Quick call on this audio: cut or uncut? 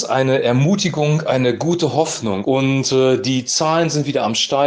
cut